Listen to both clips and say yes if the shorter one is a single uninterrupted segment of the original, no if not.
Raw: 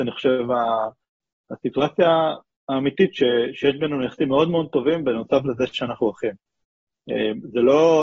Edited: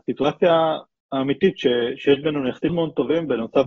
no